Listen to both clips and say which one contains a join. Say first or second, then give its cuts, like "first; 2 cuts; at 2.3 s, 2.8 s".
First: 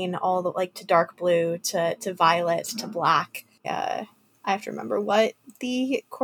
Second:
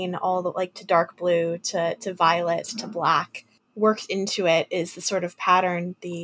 first; 1 cut; at 3.6 s